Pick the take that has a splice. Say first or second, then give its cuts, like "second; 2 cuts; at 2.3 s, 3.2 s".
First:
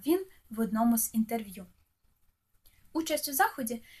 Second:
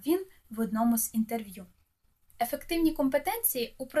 second; 1 cut; at 2.3 s